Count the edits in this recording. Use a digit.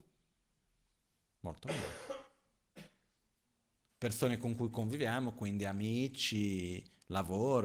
1